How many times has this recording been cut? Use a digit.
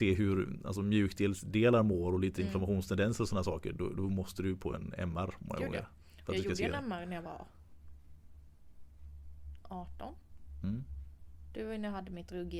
0